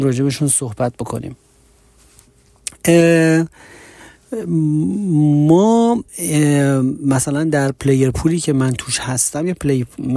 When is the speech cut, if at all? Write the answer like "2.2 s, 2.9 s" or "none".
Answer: 6.1 s